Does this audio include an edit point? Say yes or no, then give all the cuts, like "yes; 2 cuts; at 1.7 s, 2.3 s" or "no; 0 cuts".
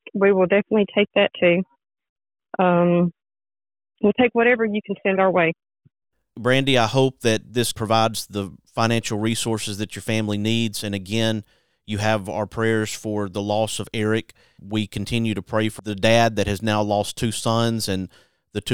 no; 0 cuts